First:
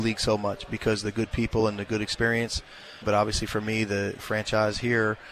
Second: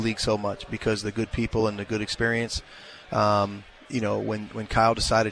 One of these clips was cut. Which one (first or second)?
first